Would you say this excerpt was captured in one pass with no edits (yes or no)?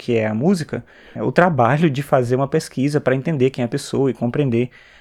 no